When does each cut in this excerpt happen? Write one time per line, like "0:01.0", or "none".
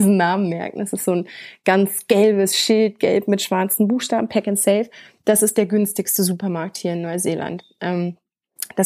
none

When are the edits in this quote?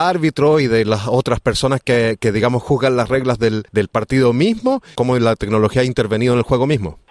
0:05.0

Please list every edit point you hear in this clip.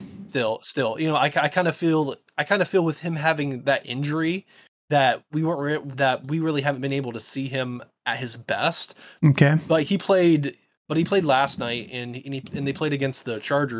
0:05.9

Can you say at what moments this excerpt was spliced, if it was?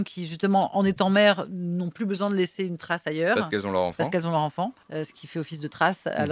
0:04.8

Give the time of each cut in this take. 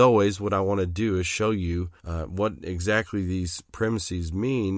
0:02.0

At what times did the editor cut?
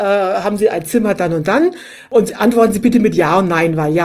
none

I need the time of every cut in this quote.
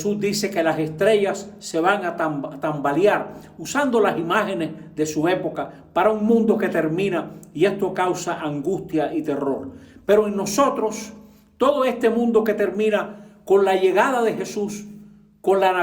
none

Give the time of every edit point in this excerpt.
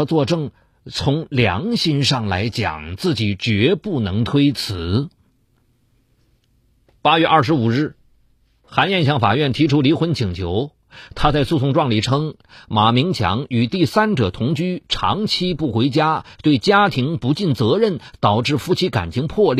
none

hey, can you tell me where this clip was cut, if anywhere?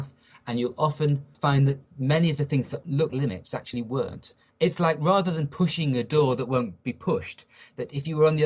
0:03.1

